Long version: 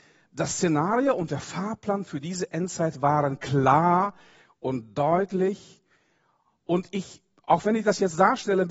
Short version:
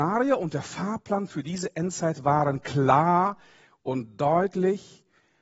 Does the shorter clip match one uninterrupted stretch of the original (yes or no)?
yes